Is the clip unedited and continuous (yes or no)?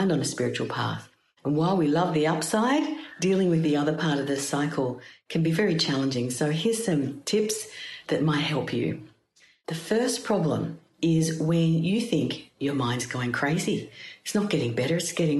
yes